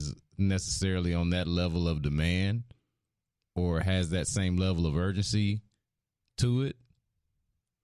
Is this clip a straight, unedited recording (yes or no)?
yes